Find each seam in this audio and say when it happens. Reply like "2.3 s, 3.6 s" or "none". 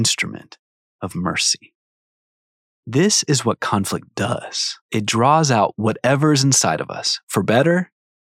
2.6 s, 4.8 s